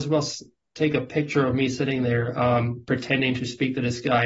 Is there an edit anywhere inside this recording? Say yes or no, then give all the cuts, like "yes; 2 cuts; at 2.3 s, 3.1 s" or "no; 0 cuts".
no; 0 cuts